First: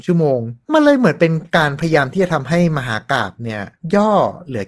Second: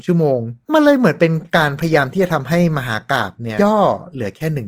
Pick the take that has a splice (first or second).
second